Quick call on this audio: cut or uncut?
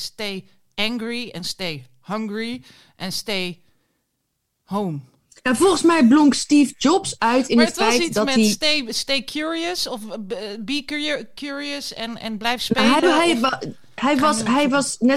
uncut